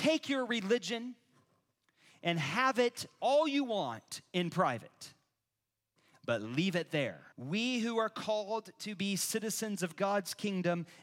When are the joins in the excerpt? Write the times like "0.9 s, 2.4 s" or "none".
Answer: 7.3 s